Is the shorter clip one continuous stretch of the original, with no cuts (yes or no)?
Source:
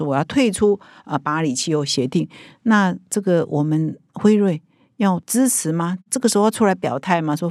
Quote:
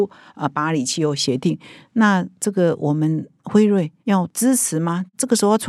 no